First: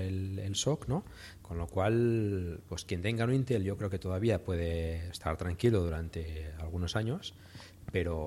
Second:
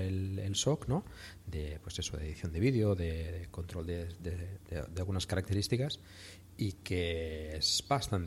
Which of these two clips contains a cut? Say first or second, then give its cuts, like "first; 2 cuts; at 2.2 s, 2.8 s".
first; 2 cuts; at 1.4 s, 2.6 s